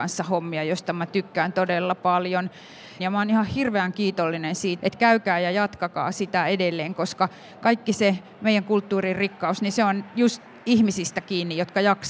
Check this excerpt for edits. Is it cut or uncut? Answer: cut